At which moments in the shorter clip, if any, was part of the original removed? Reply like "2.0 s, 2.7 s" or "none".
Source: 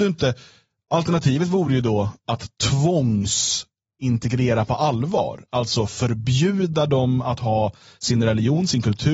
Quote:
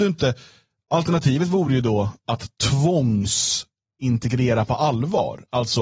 none